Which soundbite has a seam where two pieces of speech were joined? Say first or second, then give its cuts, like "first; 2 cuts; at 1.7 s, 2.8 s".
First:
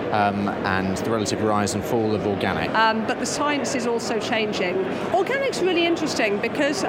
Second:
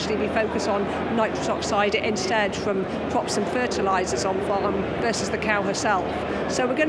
first; 2 cuts; at 2.7 s, 5.1 s